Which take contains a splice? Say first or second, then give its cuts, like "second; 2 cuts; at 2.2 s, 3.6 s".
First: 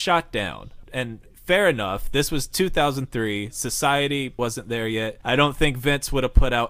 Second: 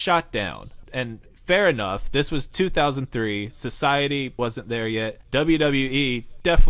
first; 1 cut; at 5.2 s